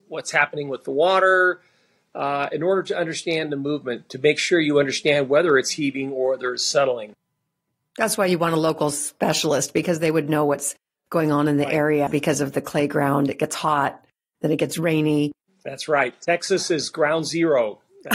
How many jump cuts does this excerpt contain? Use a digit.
1